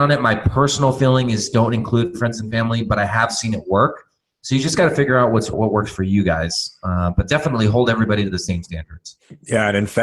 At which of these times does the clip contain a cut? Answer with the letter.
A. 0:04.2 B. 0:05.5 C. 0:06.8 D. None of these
B